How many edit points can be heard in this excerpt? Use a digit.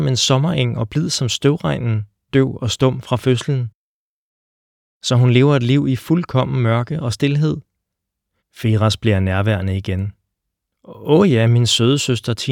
2